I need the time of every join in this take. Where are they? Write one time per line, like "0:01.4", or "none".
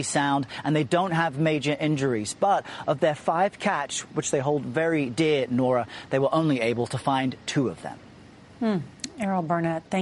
0:04.1

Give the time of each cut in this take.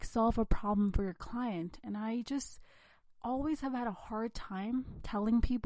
none

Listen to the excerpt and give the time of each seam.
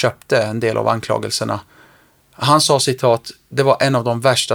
none

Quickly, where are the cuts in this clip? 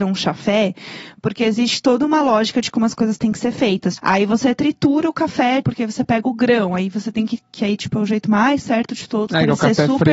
0:04.0
0:05.6

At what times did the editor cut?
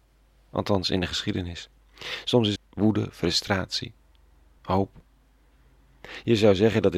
0:02.6
0:04.6

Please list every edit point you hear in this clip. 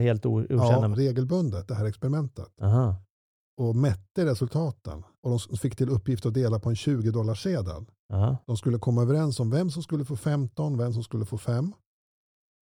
0:00.9
0:05.2

